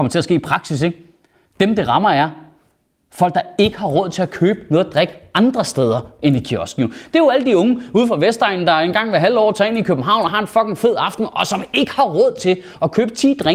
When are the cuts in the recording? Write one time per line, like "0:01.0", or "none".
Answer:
none